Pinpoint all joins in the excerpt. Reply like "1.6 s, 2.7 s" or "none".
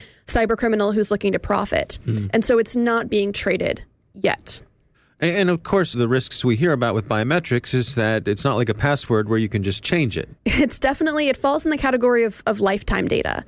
5.9 s, 10.4 s